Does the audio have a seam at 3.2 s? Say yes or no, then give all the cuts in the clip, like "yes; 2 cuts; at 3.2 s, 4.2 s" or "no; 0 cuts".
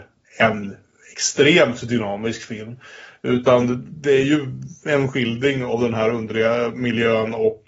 no; 0 cuts